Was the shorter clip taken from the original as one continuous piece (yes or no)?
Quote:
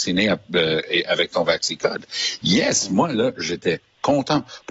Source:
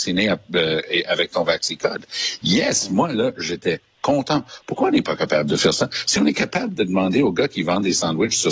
yes